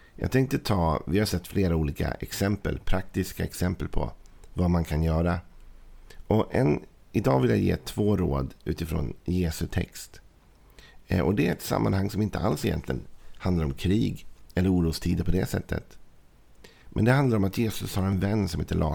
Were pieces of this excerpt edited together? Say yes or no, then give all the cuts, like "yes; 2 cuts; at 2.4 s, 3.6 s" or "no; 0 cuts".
no; 0 cuts